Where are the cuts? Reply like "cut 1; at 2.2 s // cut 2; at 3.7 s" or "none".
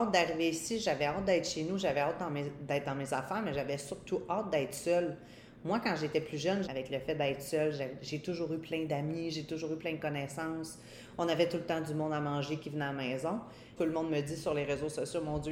cut 1; at 6.6 s // cut 2; at 13.8 s